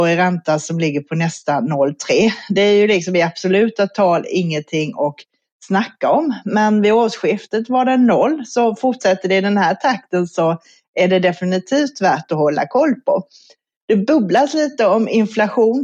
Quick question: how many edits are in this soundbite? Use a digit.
0